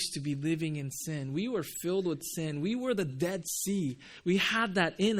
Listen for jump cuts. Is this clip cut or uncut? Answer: uncut